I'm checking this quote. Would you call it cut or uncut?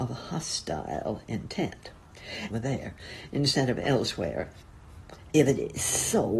cut